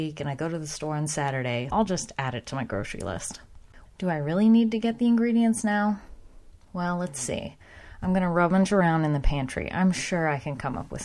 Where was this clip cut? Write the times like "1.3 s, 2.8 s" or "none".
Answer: 1.7 s, 3.9 s